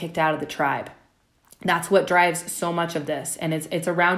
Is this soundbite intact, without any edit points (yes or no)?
yes